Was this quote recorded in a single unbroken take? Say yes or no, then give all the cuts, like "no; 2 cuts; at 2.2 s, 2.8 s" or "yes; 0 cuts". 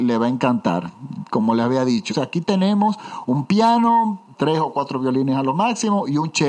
no; 2 cuts; at 2.1 s, 4.3 s